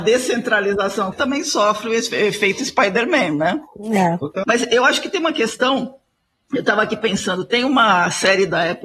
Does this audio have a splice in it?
yes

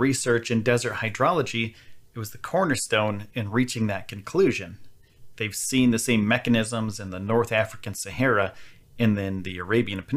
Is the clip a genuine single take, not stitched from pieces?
yes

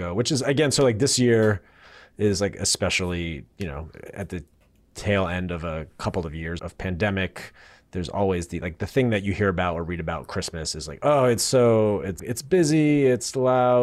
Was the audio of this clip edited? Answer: yes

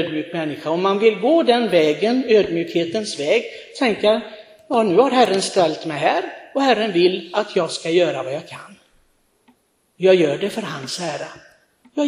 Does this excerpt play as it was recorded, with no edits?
yes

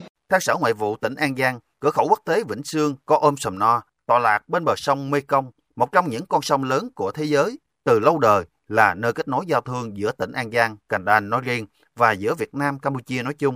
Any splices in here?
no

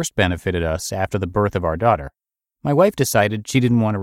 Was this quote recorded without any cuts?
yes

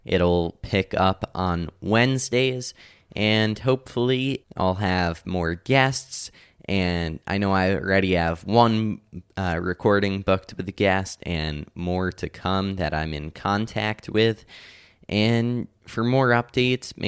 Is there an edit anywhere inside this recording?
yes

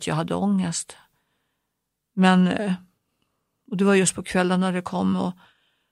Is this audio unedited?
yes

